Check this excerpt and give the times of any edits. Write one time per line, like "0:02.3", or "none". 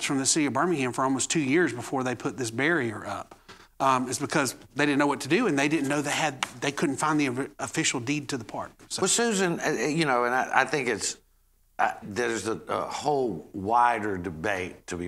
0:12.0